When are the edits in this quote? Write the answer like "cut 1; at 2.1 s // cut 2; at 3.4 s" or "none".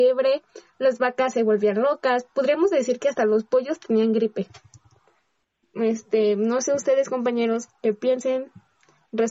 cut 1; at 7.7 s